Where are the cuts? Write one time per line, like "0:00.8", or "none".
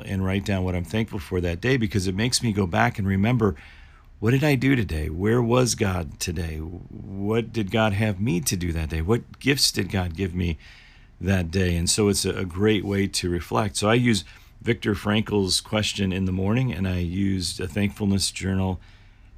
none